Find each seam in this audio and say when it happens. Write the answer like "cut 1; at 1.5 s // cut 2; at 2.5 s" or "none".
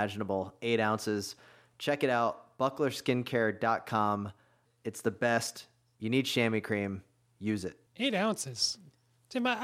cut 1; at 4.7 s // cut 2; at 7.9 s